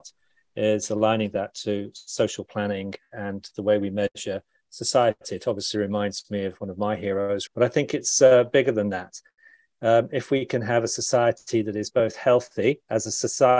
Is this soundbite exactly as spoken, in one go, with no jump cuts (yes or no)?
no